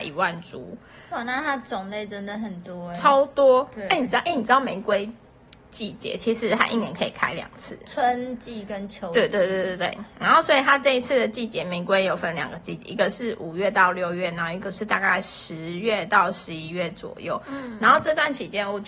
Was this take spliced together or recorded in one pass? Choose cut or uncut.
uncut